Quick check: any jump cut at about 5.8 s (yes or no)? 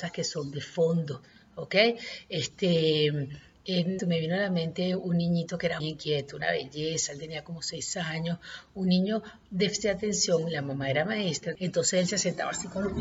yes